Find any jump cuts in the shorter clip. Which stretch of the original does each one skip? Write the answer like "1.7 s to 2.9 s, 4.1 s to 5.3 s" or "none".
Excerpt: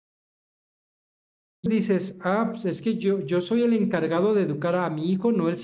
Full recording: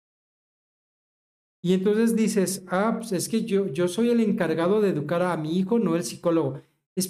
1.7 s to 2.1 s